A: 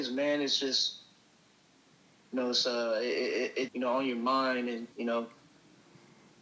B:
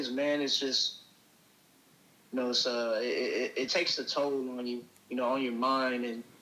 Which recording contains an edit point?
A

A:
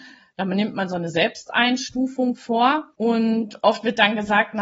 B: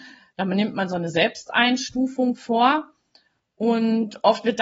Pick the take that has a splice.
A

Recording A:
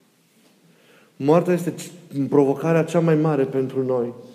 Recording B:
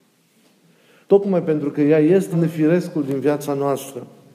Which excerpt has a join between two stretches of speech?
B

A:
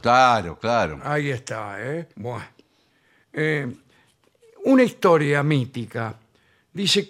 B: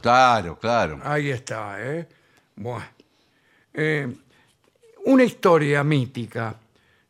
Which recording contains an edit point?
A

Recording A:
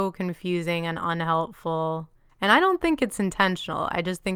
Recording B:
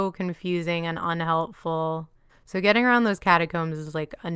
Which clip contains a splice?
B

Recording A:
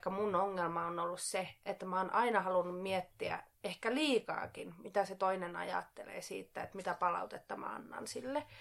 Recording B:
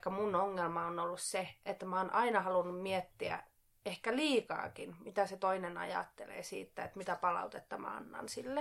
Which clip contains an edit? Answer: A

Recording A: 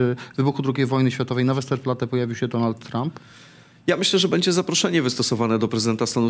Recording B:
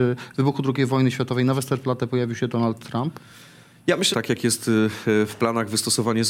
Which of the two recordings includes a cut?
B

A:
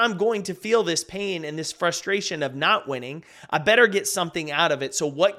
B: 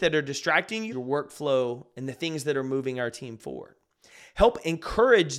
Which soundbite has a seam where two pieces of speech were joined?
B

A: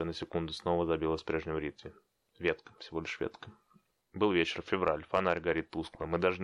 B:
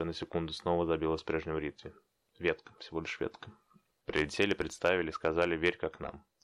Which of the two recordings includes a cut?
B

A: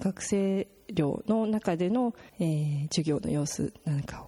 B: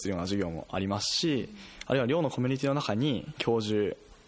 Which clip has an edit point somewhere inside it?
A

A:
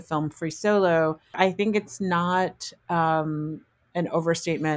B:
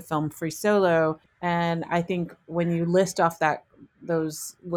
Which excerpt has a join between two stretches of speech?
B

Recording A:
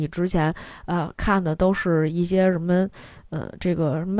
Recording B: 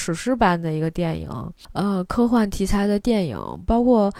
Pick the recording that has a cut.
B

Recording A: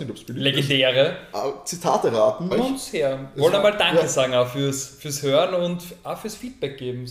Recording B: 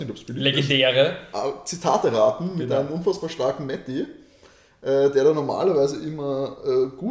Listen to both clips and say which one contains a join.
A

